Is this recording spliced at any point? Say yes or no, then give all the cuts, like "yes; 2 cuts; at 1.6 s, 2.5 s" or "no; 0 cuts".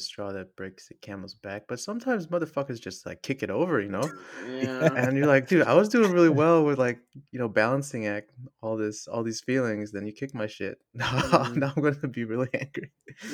no; 0 cuts